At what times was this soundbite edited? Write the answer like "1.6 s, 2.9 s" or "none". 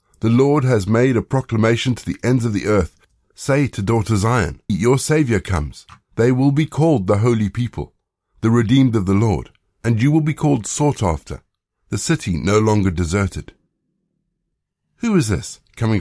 4.7 s, 6.1 s